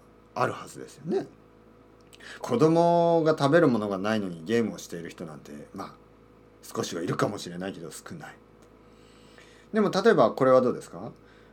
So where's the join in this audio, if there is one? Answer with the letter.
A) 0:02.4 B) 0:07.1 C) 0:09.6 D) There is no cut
A